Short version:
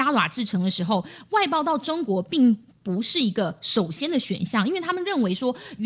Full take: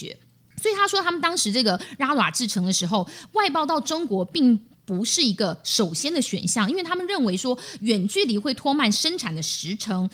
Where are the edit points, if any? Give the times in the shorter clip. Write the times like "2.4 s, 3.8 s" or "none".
none

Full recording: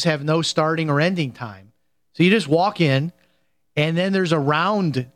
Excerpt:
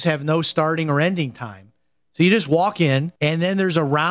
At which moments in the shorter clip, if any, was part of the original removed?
3.2 s

